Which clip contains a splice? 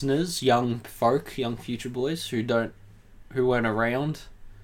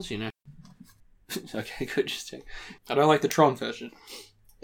second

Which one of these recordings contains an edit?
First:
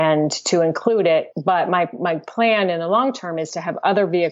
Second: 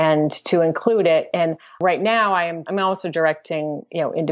first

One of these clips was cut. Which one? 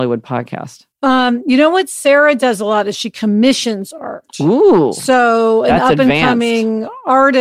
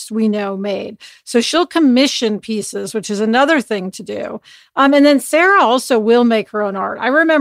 first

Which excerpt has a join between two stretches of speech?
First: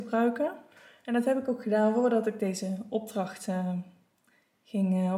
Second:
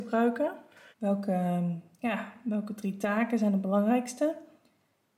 second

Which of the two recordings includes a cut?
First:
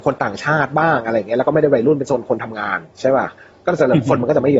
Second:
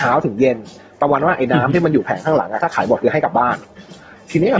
first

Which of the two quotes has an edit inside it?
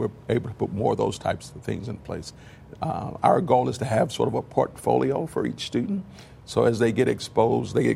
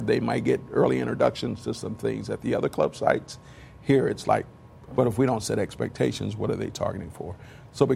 second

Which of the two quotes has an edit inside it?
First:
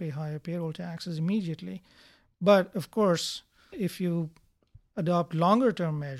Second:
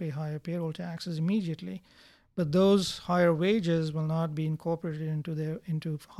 first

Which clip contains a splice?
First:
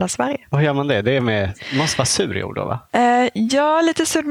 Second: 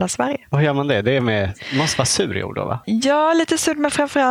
second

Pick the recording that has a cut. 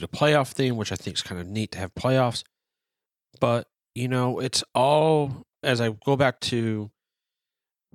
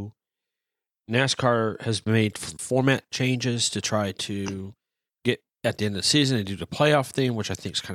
first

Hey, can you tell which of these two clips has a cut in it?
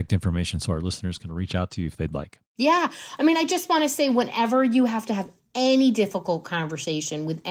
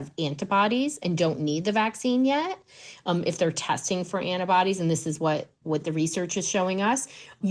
first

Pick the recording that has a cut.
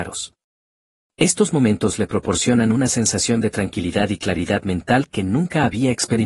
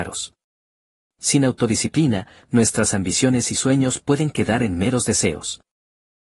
second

